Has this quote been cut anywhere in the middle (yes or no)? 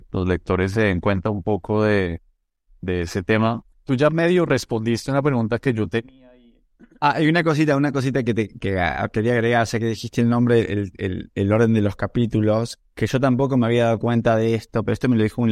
no